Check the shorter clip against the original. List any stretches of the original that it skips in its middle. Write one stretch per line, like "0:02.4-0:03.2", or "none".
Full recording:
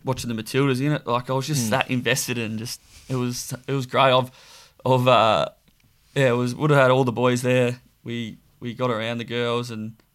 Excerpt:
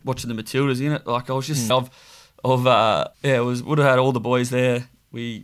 0:01.7-0:04.1
0:05.5-0:06.1